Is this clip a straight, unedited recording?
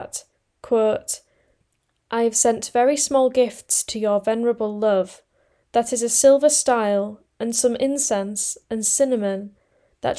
yes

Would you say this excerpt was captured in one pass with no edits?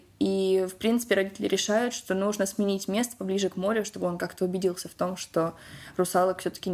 yes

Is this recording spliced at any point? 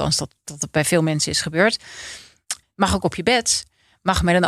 yes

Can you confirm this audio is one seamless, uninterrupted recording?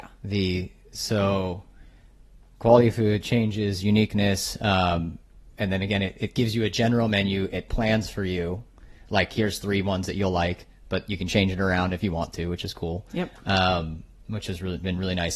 yes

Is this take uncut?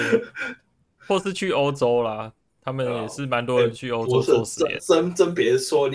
no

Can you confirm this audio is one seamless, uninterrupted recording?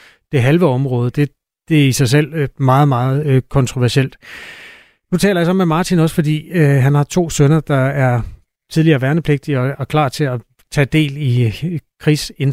yes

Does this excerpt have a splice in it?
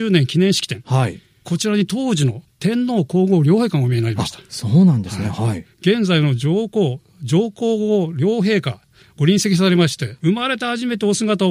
yes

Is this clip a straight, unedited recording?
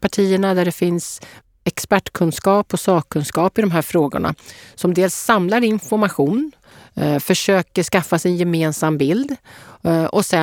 yes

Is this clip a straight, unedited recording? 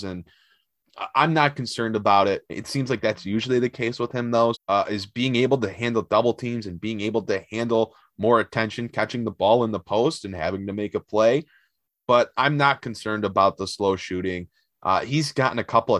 no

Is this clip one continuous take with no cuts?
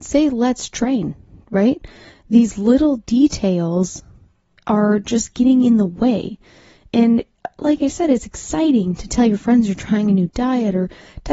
yes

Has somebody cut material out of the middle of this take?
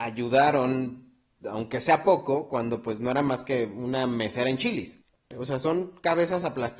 yes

